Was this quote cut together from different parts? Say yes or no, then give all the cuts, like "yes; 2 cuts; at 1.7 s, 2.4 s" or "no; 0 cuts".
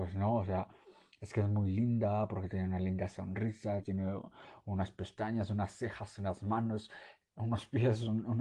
yes; 1 cut; at 3.8 s